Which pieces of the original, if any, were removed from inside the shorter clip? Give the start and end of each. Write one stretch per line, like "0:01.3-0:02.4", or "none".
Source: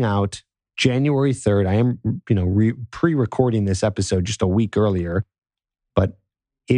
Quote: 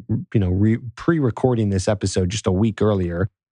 none